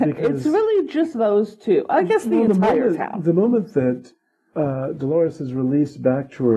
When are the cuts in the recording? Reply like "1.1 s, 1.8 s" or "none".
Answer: none